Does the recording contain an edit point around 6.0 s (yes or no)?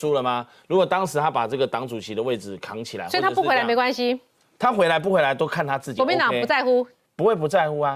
yes